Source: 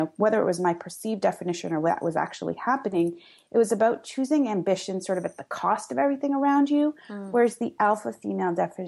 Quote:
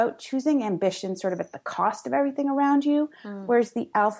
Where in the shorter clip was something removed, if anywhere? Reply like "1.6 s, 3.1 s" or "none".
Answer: none